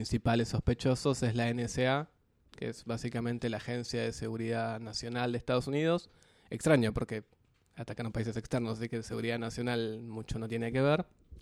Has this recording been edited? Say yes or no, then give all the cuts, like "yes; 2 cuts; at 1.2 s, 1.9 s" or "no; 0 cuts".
no; 0 cuts